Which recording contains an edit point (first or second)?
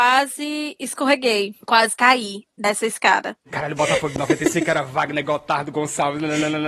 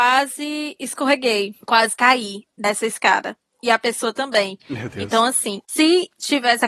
first